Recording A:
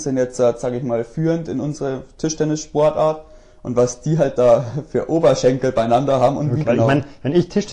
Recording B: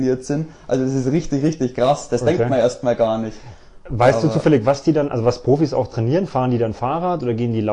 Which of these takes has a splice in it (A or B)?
A